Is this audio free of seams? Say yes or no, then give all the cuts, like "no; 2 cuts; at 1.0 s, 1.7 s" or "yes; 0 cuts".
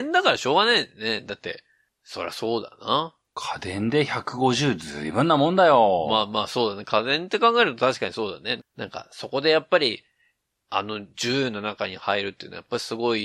no; 1 cut; at 8.6 s